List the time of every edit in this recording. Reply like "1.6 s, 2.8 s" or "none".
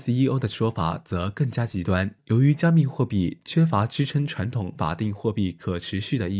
2.2 s